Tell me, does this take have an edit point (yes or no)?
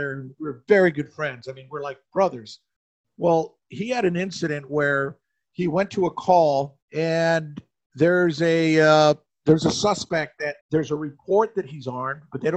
yes